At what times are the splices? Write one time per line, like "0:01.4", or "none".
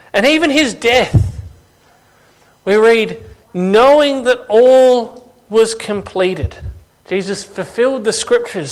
0:03.4
0:06.9